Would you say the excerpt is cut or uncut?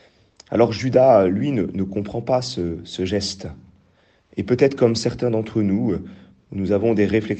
uncut